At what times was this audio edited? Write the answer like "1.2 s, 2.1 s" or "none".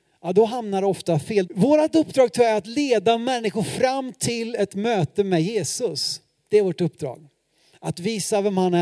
1.5 s